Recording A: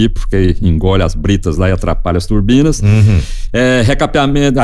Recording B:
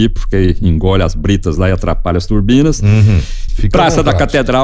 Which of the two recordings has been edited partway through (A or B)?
B